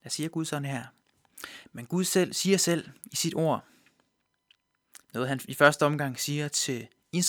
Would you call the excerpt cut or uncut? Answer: cut